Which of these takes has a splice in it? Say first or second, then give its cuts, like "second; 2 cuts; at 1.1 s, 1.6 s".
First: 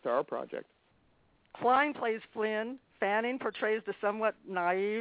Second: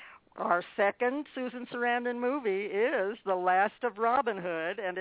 first; 1 cut; at 1.4 s